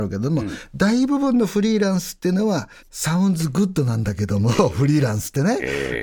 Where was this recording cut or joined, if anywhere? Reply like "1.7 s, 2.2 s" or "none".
2.8 s